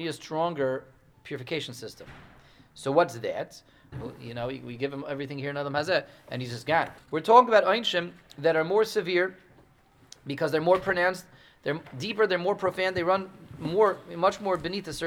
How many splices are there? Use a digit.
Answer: 2